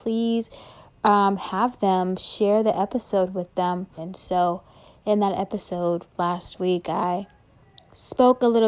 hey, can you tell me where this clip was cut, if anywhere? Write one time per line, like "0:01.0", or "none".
0:04.0